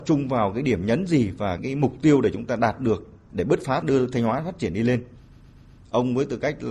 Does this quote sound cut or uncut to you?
cut